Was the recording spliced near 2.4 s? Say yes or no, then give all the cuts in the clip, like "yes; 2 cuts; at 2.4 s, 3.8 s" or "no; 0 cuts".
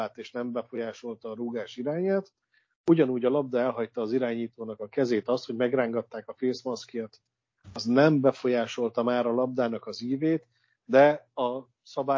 no; 0 cuts